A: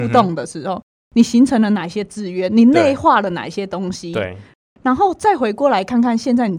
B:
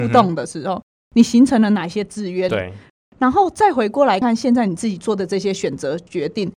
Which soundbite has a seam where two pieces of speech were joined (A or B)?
B